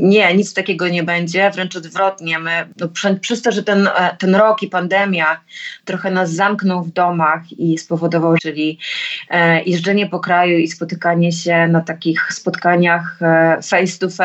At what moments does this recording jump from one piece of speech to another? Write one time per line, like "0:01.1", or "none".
0:08.4